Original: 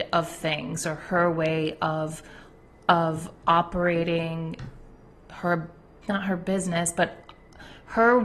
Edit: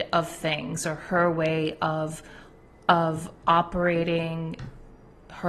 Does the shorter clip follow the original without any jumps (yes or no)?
yes